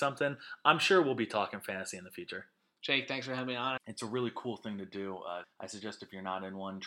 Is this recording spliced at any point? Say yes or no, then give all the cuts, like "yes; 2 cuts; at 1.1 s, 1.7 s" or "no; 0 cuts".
yes; 2 cuts; at 3.8 s, 5.4 s